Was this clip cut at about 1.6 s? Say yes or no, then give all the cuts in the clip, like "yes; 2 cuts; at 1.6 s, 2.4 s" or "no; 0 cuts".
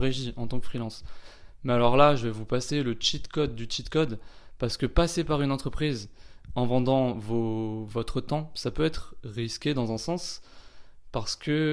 no; 0 cuts